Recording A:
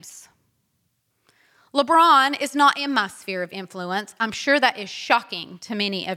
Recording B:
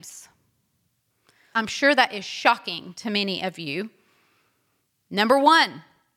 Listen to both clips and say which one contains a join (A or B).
B